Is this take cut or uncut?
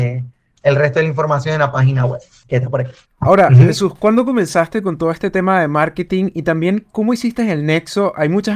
uncut